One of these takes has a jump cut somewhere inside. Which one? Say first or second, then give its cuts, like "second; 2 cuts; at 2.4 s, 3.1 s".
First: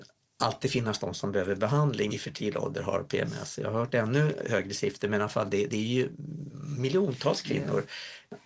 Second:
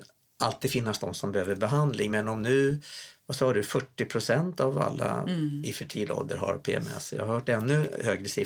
first; 1 cut; at 2.1 s